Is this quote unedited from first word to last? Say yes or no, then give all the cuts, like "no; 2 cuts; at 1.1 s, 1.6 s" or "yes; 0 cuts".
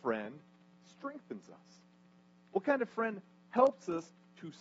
yes; 0 cuts